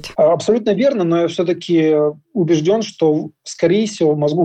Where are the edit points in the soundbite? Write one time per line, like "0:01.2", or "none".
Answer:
none